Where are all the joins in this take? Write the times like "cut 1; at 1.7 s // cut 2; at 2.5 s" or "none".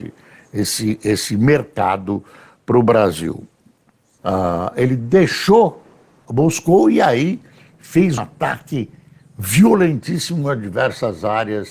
cut 1; at 4.2 s // cut 2; at 6.3 s // cut 3; at 8.2 s